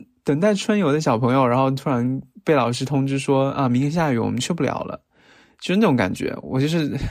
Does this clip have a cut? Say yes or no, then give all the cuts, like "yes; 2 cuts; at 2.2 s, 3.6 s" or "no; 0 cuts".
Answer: no; 0 cuts